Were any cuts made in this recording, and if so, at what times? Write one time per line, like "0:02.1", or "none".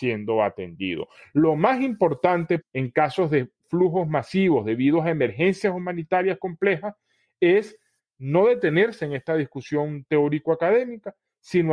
0:02.6